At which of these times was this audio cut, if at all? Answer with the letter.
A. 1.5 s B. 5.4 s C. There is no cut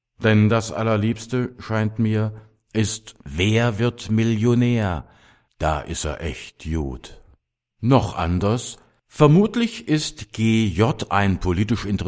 C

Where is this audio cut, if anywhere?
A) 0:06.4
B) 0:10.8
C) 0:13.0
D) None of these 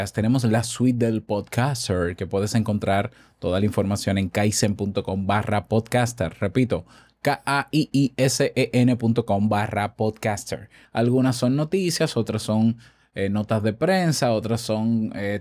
B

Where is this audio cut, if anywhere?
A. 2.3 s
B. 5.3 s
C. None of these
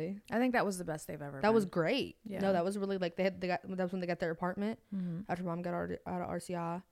C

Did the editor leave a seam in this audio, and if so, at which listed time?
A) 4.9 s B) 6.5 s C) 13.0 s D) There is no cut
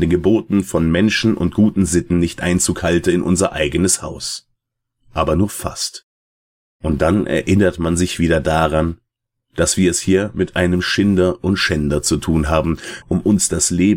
C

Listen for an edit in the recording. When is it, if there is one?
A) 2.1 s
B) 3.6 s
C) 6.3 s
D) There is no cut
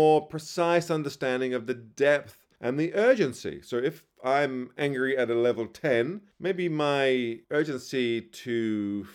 D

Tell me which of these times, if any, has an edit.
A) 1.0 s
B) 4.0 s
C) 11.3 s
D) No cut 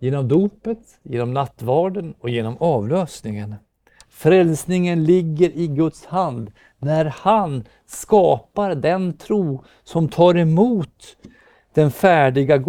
A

